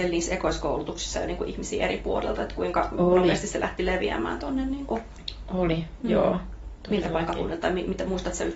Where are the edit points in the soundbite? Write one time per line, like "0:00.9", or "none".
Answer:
none